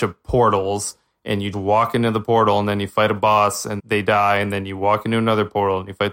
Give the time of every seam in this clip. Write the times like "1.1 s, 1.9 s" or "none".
1.5 s, 3.8 s